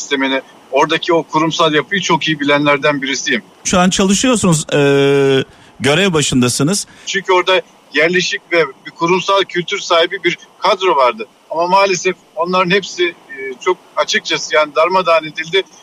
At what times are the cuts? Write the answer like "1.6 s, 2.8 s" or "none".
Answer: 3.6 s, 4.7 s, 7.1 s

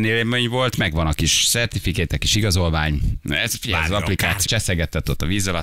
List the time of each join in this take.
4.4 s

